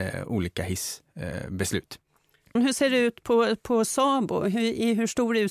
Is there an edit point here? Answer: yes; 1 cut; at 2.6 s

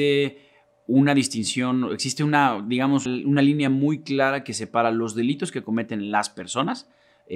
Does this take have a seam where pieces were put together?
yes; 1 cut; at 3.1 s

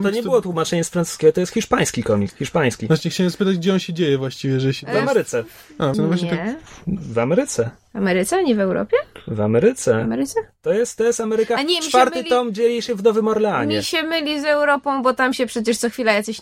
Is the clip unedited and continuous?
no; 2 cuts; at 2.3 s, 5.9 s

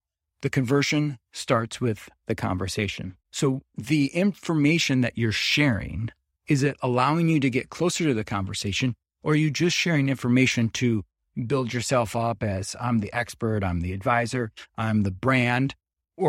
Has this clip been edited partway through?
yes; 1 cut; at 3.2 s

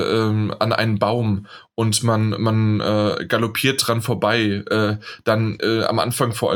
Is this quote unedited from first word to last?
yes; 0 cuts

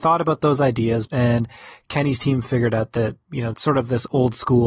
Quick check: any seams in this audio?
yes; 2 cuts; at 1.1 s, 3.5 s

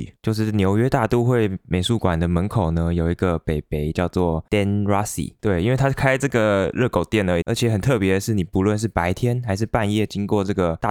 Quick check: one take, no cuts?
no; 2 cuts; at 5.4 s, 7.4 s

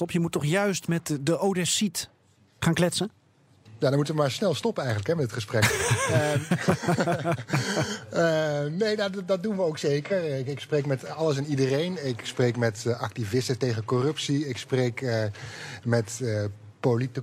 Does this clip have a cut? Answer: no; 0 cuts

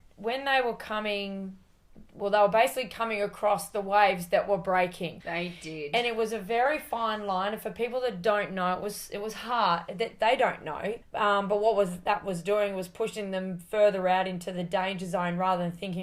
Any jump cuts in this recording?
yes; 2 cuts; at 5.2 s, 11.0 s

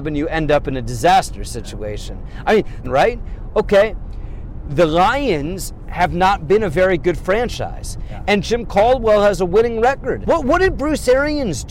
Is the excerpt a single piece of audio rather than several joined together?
no; 2 cuts; at 2.8 s, 10.2 s

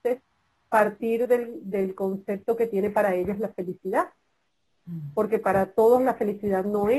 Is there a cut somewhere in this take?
no; 0 cuts

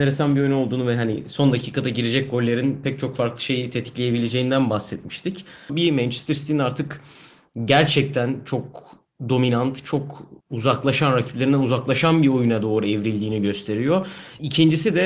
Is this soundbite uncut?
no; 2 cuts; at 5.7 s, 10.4 s

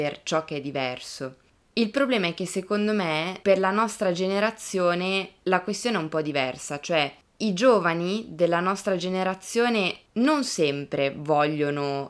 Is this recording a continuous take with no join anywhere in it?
yes; 0 cuts

